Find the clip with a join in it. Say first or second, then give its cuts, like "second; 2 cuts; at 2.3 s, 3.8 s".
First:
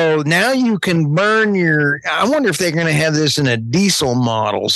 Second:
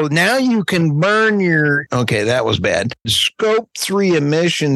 second; 2 cuts; at 1.9 s, 3.0 s